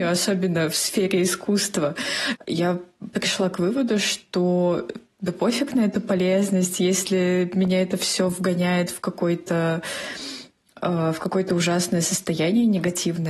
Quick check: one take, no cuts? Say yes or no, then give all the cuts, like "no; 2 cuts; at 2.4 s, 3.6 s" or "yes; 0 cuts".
no; 1 cut; at 2.4 s